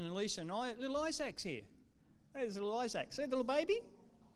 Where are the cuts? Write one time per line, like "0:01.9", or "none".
none